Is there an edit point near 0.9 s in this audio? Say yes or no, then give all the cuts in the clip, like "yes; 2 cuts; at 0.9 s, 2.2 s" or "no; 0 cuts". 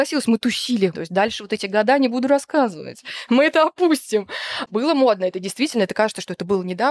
yes; 2 cuts; at 0.9 s, 4.7 s